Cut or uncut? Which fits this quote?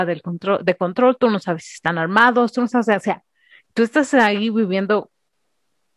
uncut